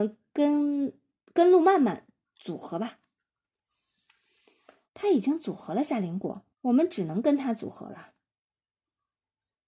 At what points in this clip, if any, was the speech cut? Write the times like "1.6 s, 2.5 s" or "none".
4.9 s, 6.5 s